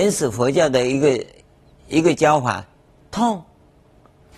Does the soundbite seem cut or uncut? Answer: uncut